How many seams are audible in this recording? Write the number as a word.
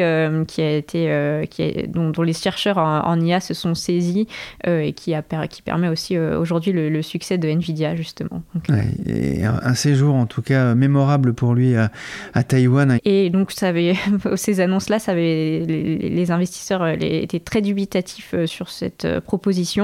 two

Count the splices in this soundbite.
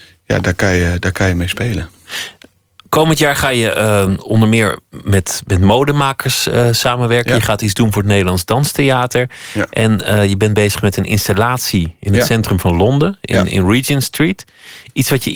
zero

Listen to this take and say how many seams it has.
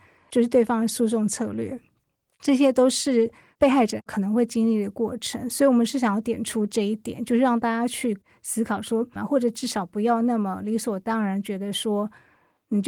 one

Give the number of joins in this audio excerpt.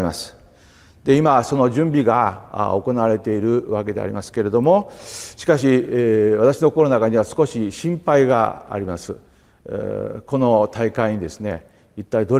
zero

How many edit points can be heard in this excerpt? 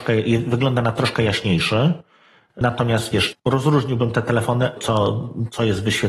two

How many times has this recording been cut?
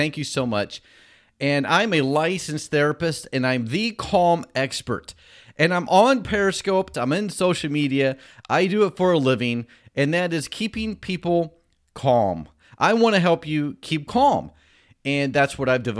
one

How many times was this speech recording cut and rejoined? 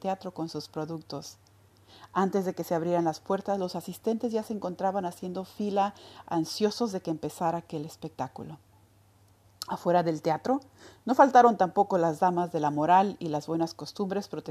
zero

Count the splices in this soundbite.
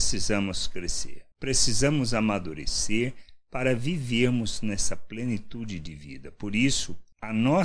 zero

